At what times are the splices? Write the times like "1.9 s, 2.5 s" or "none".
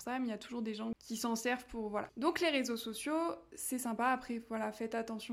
none